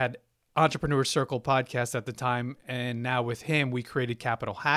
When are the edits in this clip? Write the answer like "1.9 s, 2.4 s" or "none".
none